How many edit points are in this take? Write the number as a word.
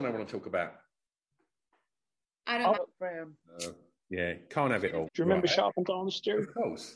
two